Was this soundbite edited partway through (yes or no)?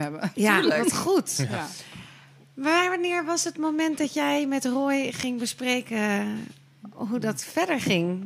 no